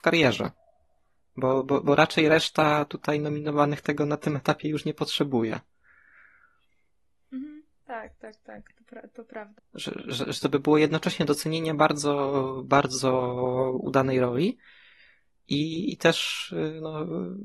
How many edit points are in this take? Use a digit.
2